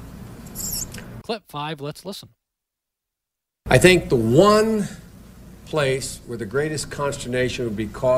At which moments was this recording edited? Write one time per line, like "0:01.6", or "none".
0:01.2